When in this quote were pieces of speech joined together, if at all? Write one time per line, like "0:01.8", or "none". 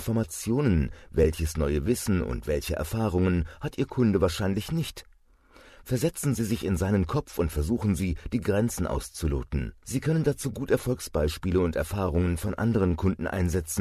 0:09.8